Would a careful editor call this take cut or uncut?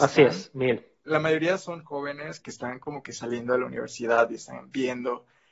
cut